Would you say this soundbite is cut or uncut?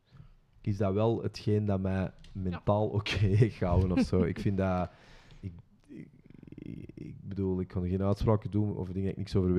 uncut